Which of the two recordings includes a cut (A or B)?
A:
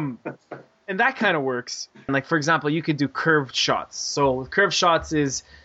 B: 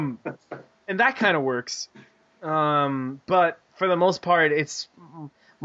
A